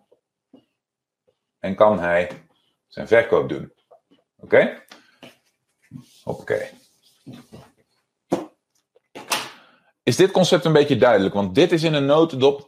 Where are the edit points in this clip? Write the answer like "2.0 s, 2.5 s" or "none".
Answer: none